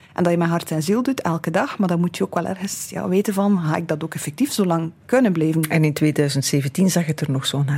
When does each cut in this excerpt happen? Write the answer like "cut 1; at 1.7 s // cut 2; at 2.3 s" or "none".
none